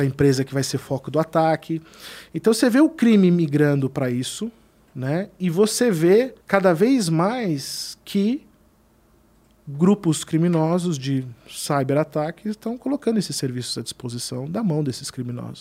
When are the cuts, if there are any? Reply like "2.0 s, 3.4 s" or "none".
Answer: 6.4 s